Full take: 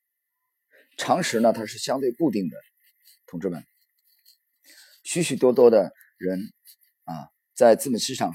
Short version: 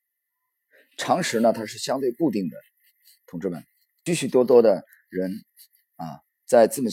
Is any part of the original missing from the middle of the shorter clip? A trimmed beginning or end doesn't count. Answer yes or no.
yes